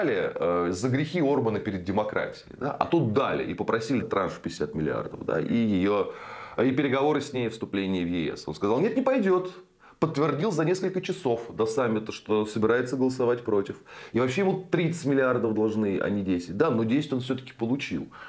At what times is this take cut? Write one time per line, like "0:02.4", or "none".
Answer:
0:04.0